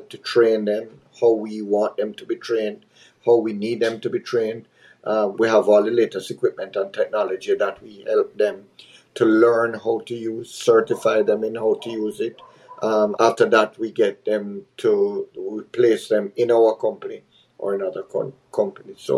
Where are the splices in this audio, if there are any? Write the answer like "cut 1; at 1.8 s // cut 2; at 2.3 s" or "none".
cut 1; at 5.3 s // cut 2; at 13.2 s